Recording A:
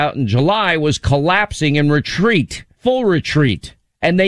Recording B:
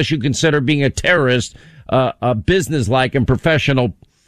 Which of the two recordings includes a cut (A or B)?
A